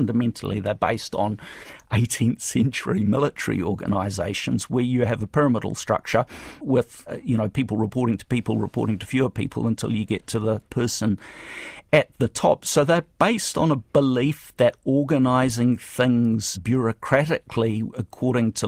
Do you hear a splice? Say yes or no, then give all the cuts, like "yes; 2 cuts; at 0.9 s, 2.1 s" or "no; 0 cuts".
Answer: no; 0 cuts